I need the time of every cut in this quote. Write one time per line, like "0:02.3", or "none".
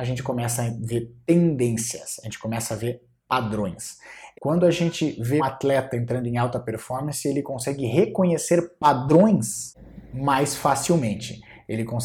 0:04.3
0:05.4